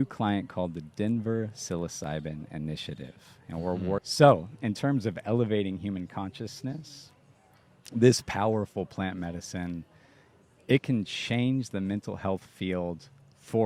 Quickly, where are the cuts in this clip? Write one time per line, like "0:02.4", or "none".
0:04.0